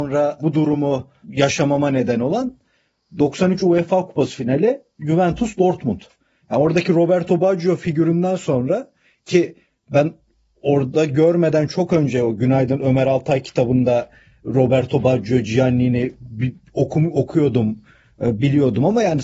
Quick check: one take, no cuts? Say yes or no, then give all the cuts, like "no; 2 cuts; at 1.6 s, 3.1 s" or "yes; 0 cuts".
yes; 0 cuts